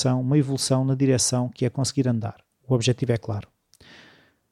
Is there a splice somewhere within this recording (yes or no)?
no